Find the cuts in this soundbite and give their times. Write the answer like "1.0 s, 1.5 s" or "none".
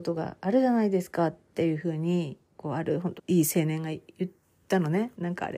3.2 s